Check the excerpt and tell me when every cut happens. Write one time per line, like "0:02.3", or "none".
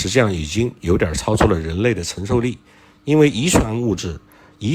none